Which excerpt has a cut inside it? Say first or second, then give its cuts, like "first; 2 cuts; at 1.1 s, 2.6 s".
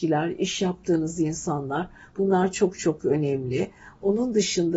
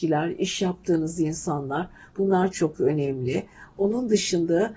second; 1 cut; at 2.5 s